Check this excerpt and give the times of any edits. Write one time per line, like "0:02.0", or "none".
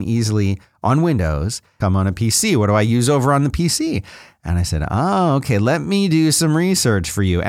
0:01.8